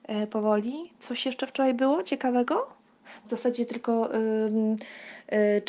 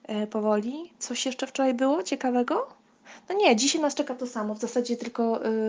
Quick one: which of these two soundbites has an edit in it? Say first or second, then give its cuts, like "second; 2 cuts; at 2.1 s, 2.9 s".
first; 1 cut; at 3.2 s